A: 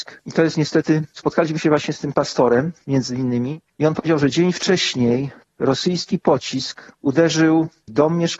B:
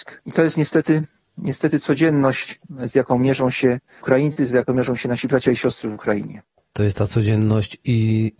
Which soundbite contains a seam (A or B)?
A